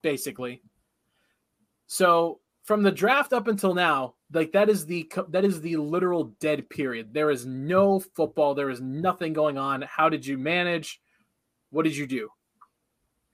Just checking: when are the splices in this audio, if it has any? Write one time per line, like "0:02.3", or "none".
none